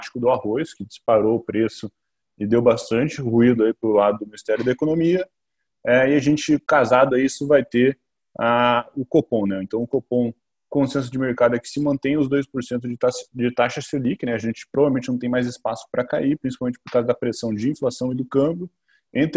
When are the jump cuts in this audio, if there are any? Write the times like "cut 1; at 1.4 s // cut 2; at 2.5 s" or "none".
none